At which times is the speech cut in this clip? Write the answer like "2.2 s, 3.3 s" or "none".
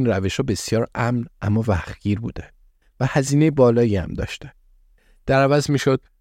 none